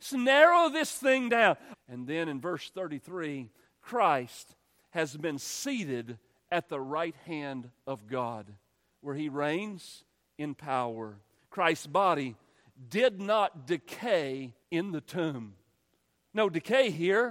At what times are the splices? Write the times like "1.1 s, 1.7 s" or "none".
1.7 s, 11.4 s, 14.6 s